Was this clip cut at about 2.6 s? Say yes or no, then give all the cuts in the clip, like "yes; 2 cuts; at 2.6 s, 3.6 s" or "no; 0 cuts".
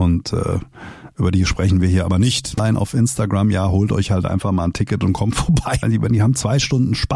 yes; 2 cuts; at 2.6 s, 5.8 s